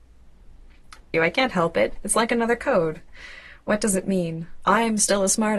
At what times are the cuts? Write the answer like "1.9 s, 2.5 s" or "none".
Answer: 1.1 s

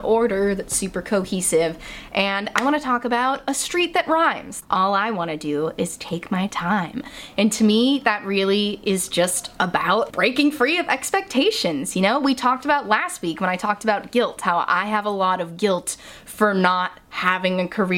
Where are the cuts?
4.6 s

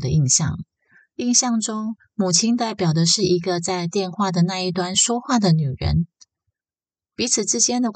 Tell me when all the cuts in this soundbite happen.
1.2 s

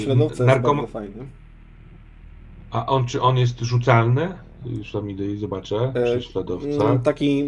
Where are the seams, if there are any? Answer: none

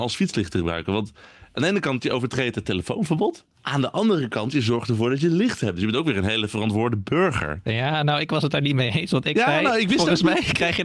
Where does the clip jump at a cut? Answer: 3.5 s

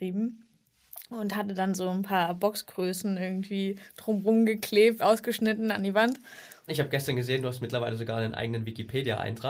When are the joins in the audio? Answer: 5.0 s, 6.7 s

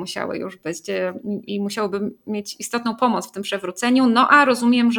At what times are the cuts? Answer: none

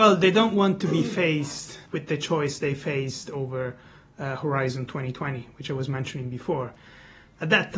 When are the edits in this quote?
1.9 s

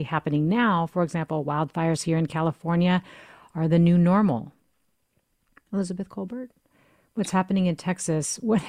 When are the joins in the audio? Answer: none

